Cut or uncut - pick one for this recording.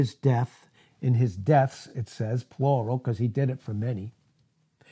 uncut